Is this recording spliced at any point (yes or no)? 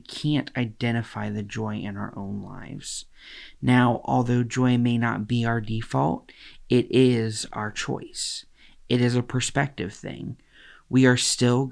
no